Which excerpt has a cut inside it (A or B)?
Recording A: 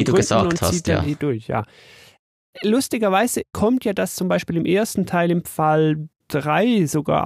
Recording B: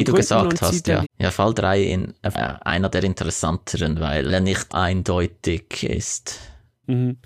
B